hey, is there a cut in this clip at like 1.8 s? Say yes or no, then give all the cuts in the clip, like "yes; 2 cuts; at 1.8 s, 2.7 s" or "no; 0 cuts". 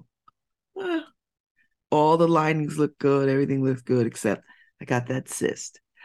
no; 0 cuts